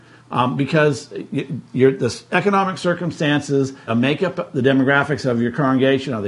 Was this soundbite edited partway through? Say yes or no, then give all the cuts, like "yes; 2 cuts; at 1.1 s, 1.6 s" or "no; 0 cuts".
yes; 1 cut; at 3.9 s